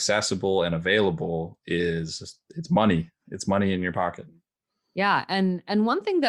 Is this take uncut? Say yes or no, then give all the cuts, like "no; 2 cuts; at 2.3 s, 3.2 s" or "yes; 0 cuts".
yes; 0 cuts